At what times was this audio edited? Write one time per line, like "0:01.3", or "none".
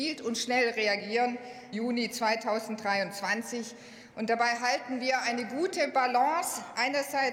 0:01.7
0:04.1